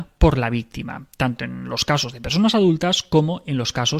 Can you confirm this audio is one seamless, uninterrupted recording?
yes; 0 cuts

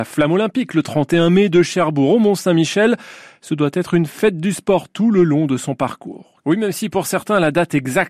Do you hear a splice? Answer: yes; 1 cut; at 6.4 s

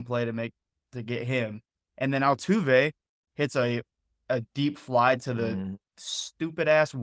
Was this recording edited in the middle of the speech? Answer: no; 0 cuts

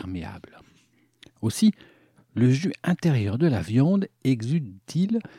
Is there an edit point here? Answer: yes; 1 cut; at 2.2 s

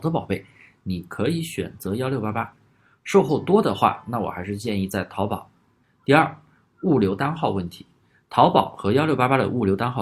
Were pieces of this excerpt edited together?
yes; 1 cut; at 5.8 s

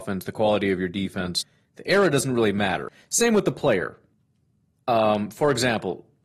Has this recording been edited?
no; 0 cuts

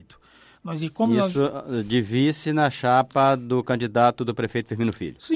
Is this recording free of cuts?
yes; 0 cuts

